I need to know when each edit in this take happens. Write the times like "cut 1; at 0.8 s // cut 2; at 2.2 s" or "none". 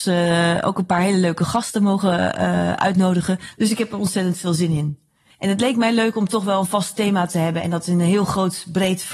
cut 1; at 5.3 s